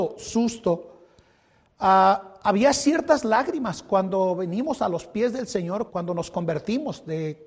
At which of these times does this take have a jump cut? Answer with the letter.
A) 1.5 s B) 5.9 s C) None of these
B